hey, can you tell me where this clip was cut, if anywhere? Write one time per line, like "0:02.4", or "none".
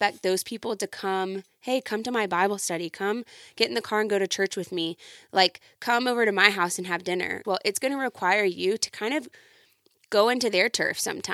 0:07.4